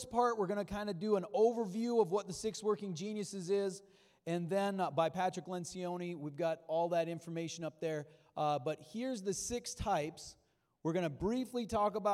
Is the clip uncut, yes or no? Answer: yes